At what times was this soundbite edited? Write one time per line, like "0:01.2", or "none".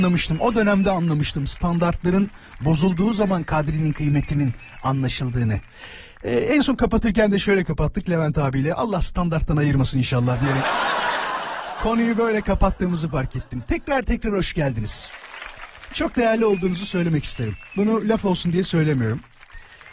none